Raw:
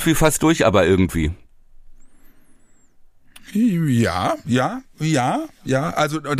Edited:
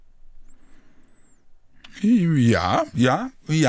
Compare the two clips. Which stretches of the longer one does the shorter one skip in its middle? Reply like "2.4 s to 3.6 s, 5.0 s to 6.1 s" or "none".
none

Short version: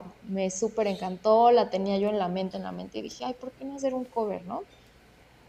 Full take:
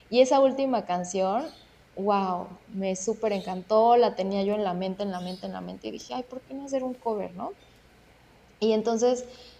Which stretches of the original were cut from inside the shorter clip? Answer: 5.0 s to 5.4 s

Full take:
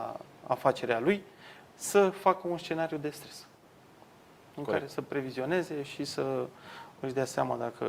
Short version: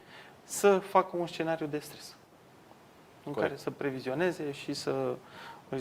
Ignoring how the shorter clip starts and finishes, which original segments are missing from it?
none

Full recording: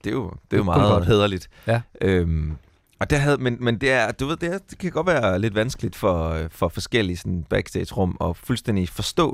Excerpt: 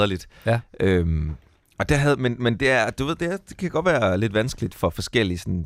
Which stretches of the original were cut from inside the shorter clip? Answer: 5.9 s to 6.5 s

